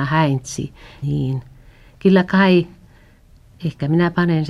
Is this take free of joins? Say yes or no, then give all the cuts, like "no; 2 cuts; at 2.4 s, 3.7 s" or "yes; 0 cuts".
no; 1 cut; at 1.0 s